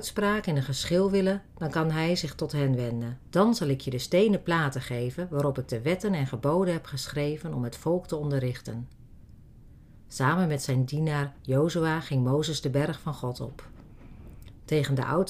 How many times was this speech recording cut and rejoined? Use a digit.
1